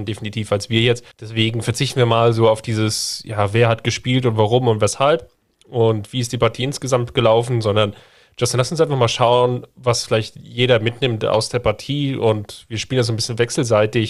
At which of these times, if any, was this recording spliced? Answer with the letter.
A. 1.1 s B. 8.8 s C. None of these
A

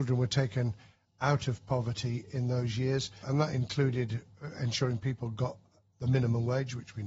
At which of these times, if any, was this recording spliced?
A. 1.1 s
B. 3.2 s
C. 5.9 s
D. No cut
B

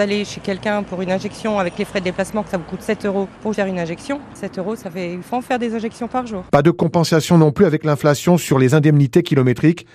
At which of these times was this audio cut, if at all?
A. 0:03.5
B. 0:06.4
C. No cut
A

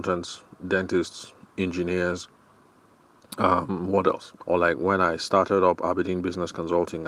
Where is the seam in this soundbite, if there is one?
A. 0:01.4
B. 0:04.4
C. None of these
B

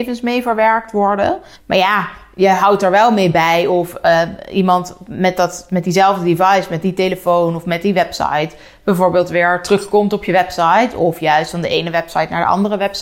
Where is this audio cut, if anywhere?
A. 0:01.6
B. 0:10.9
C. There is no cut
A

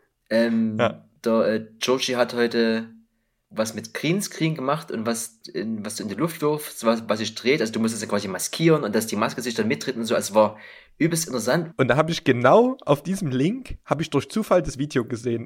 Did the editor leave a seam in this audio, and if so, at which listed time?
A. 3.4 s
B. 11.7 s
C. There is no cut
B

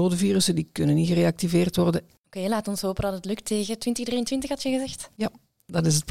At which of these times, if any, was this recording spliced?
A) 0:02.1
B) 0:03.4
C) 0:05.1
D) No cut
A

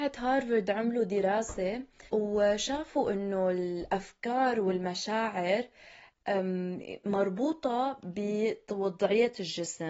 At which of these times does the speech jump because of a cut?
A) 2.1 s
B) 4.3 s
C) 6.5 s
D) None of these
A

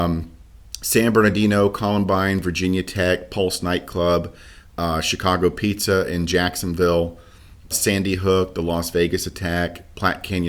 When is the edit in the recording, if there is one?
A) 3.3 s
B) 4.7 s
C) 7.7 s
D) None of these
C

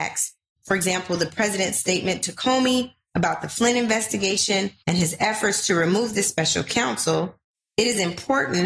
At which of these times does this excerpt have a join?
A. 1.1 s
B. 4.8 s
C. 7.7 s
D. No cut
B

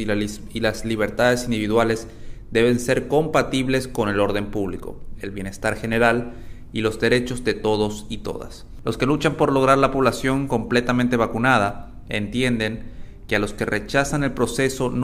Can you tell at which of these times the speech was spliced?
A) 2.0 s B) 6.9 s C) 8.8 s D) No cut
C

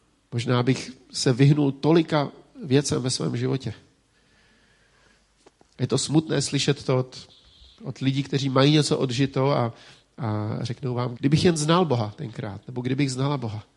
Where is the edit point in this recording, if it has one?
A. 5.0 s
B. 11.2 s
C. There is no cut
B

